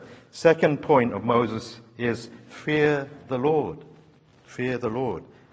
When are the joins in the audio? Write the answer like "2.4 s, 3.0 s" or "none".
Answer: none